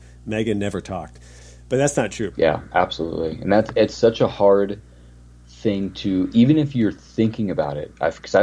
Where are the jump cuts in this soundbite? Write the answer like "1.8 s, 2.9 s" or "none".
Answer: 2.3 s